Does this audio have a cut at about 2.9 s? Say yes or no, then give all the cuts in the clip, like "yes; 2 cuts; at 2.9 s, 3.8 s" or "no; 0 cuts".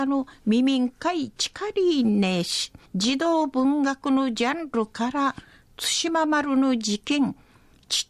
yes; 1 cut; at 2.9 s